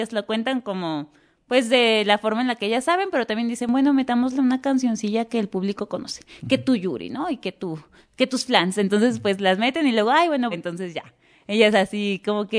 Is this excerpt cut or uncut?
cut